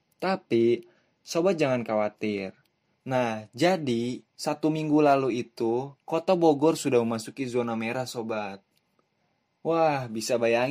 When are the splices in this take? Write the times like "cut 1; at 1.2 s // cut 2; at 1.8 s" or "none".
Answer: cut 1; at 2.9 s // cut 2; at 4.3 s // cut 3; at 6.0 s